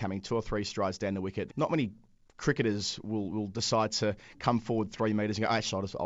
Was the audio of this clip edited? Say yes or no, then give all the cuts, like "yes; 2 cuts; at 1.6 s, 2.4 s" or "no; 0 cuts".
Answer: yes; 1 cut; at 1.5 s